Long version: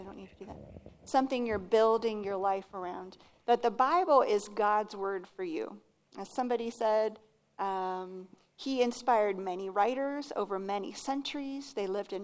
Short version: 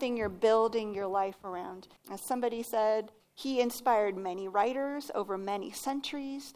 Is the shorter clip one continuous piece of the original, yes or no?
no